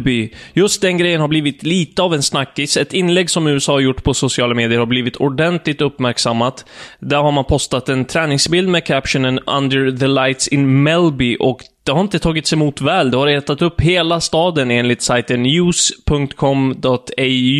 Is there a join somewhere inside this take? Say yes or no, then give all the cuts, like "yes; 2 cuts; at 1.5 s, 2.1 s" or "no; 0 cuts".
no; 0 cuts